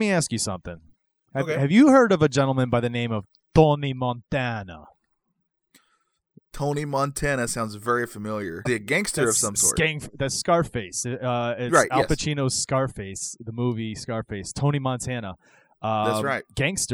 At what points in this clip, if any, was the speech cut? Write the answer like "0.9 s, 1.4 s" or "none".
8.7 s